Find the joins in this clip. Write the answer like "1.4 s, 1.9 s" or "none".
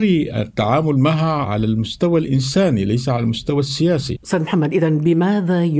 4.2 s

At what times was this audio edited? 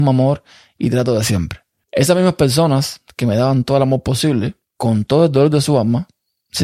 1.8 s, 4.6 s

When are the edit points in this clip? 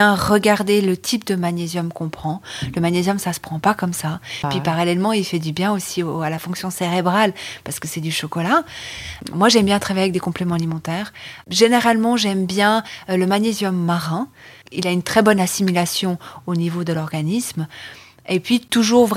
4.4 s

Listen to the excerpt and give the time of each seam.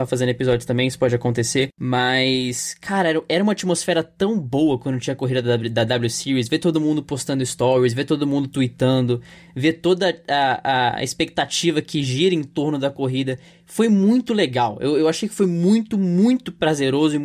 none

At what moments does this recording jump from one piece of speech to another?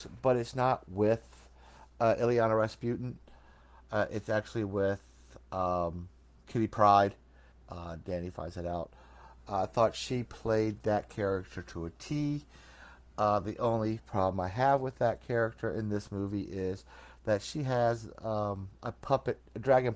7.5 s, 9.4 s

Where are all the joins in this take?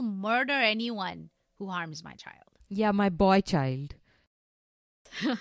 none

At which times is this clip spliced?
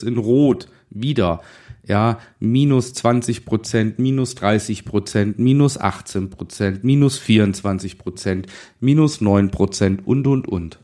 none

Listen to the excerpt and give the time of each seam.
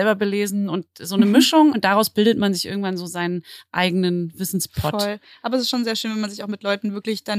1.7 s

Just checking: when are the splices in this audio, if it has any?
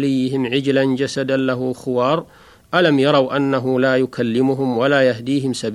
none

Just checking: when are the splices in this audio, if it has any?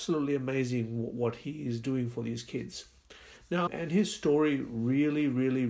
3.7 s

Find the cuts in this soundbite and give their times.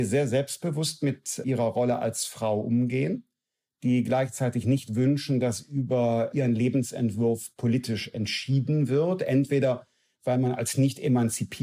none

